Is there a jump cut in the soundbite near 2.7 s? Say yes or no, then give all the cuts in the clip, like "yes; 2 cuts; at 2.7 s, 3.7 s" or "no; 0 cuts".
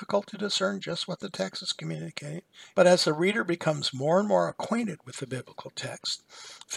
yes; 1 cut; at 2.7 s